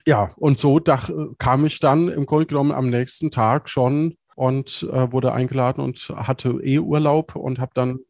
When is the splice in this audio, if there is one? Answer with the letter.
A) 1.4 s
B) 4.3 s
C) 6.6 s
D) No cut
B